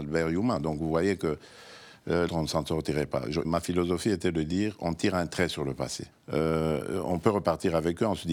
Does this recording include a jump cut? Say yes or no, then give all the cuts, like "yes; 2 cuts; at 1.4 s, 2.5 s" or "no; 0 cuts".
yes; 3 cuts; at 2.3 s, 3.4 s, 6.1 s